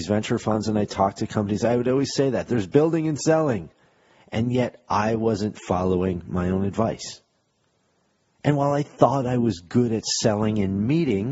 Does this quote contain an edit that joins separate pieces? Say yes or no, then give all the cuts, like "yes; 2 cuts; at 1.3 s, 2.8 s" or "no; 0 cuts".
no; 0 cuts